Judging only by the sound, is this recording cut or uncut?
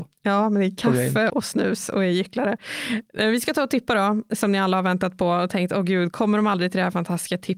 cut